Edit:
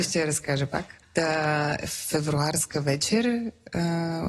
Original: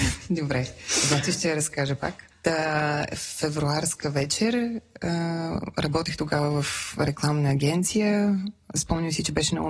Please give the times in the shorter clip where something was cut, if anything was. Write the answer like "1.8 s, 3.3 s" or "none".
none